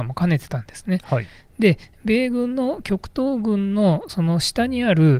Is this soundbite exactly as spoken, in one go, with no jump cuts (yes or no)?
yes